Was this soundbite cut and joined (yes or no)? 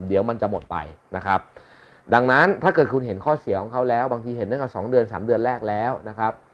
no